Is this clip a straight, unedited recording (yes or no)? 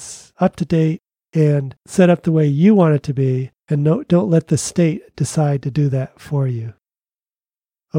yes